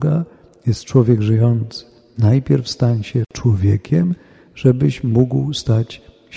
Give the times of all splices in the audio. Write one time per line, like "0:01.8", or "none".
none